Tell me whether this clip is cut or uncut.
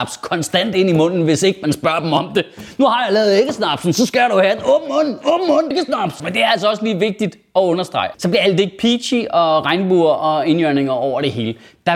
cut